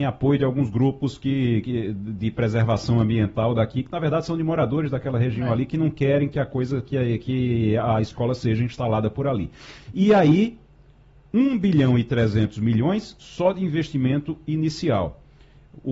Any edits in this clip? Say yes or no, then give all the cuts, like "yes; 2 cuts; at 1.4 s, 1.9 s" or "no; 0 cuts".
no; 0 cuts